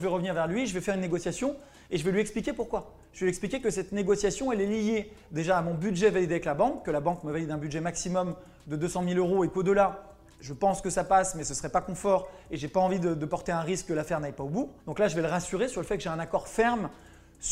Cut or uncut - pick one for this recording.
cut